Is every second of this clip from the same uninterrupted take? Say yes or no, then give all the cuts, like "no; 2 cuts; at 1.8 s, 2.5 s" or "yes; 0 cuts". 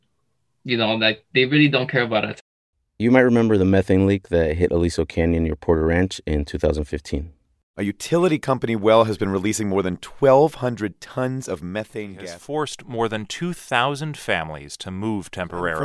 yes; 0 cuts